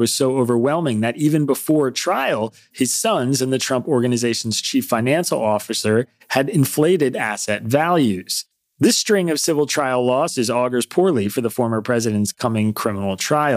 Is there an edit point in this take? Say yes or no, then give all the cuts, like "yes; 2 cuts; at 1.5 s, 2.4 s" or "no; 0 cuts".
yes; 1 cut; at 2.7 s